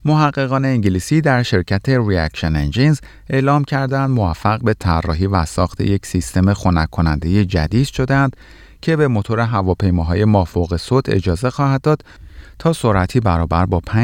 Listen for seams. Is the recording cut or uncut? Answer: uncut